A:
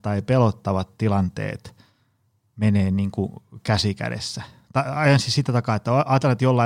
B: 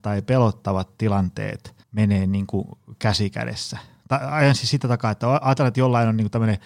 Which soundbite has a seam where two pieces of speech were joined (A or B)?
B